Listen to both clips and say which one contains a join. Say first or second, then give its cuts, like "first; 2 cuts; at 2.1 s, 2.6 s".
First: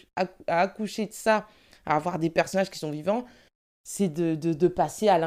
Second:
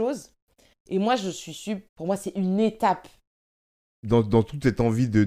second; 1 cut; at 1.9 s